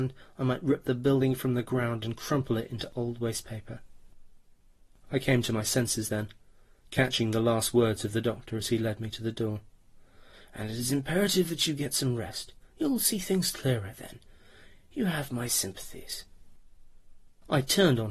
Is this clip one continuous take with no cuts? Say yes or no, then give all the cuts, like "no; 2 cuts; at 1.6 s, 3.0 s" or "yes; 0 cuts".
yes; 0 cuts